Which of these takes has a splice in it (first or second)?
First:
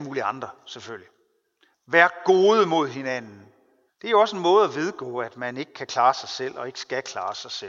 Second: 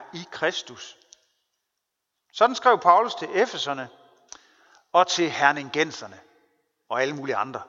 first